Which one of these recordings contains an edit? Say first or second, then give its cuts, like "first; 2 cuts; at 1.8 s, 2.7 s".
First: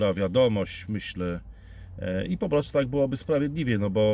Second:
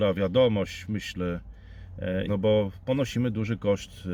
second; 1 cut; at 2.3 s